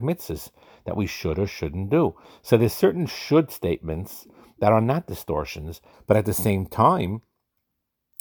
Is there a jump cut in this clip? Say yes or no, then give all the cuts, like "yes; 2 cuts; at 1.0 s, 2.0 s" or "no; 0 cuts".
yes; 1 cut; at 5.9 s